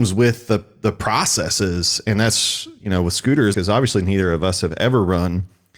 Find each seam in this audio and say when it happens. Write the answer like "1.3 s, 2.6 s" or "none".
3.5 s

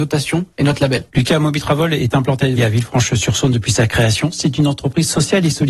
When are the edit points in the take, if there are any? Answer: 1.1 s, 2.6 s

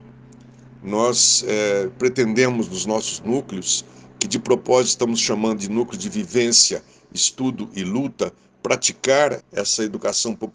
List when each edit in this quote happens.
9.4 s

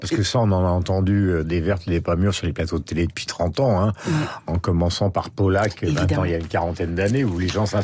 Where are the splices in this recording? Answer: none

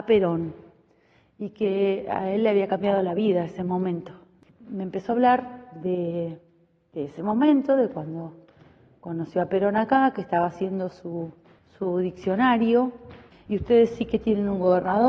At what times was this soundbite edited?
13.5 s

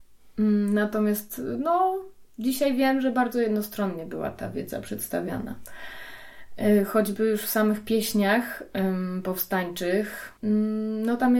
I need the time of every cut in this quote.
10.4 s

